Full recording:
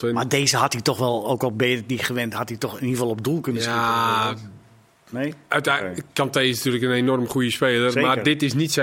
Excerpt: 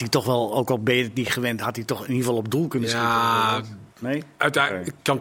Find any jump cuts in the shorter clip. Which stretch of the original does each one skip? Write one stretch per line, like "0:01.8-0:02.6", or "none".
0:04.6-0:05.0